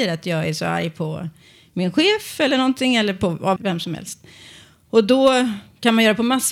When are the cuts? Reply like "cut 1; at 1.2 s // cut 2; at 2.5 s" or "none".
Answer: cut 1; at 3.6 s